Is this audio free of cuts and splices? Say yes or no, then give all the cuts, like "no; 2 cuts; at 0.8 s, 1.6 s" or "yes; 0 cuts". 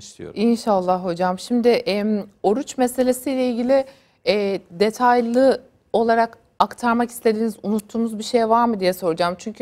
yes; 0 cuts